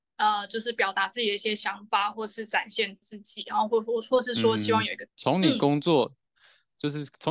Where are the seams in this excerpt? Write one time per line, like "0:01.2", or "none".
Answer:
0:05.1